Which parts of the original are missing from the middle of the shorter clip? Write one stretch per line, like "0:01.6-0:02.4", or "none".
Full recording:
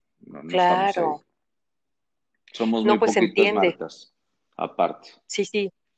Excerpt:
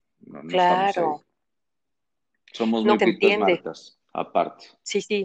0:03.0-0:03.1
0:04.2-0:04.5

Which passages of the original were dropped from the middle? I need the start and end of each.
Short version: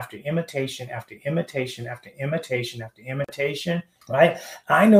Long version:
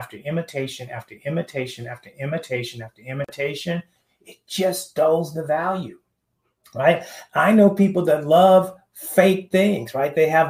0:04.0-0:06.7

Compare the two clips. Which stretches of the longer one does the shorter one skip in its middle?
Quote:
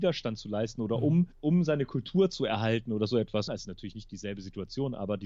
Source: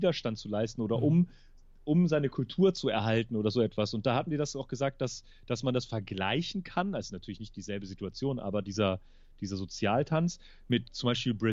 0:01.3-0:01.8
0:03.9-0:06.9

